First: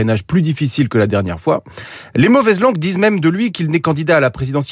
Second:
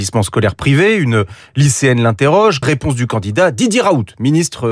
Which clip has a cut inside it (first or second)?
second